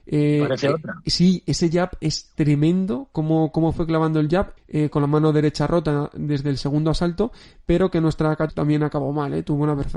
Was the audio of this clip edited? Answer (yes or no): yes